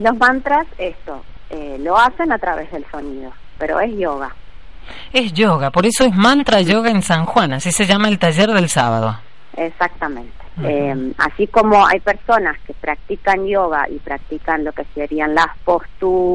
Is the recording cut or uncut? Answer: cut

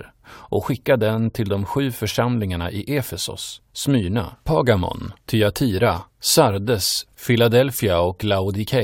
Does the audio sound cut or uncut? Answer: uncut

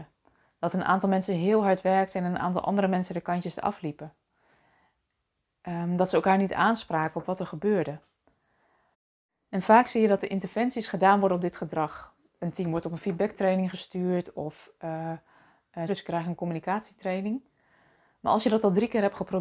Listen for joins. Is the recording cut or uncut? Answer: cut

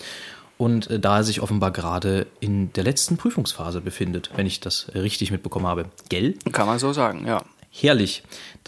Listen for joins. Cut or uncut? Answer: uncut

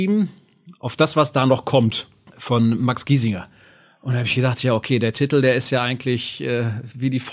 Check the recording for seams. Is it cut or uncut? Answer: uncut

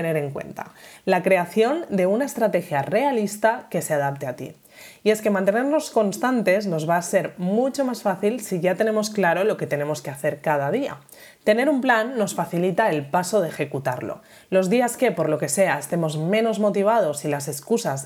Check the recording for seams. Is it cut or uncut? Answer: uncut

